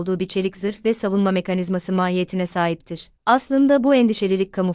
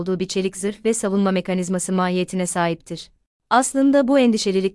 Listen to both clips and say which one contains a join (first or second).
first